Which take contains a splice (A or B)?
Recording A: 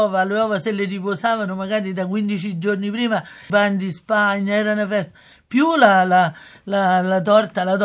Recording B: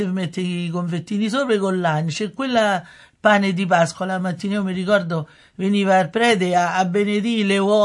A